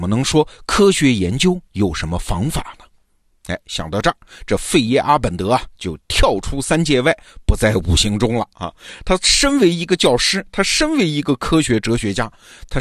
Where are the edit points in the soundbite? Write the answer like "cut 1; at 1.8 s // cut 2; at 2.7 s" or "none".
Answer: none